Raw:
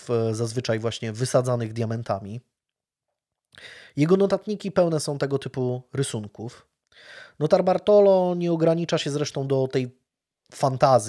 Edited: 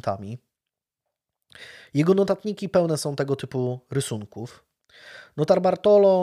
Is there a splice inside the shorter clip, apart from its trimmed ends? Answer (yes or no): no